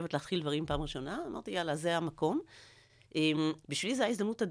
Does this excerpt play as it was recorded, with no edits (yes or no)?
no